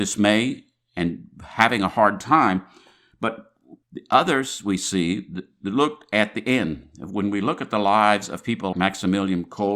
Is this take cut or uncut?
cut